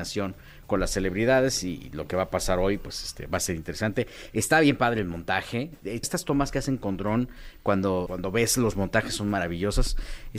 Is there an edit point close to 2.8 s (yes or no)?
no